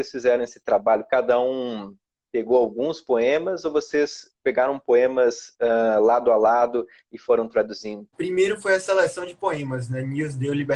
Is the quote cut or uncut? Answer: cut